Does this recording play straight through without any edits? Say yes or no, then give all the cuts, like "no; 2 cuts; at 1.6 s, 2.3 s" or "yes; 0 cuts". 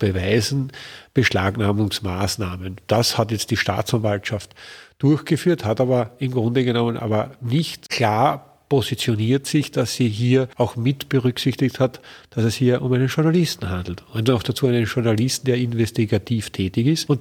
yes; 0 cuts